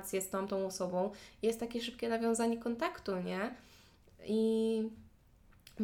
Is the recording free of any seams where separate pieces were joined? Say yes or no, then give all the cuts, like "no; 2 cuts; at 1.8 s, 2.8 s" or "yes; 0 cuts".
yes; 0 cuts